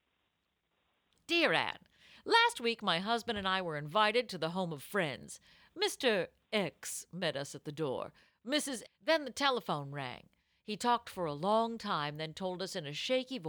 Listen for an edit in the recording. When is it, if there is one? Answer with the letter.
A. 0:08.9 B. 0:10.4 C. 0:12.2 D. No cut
A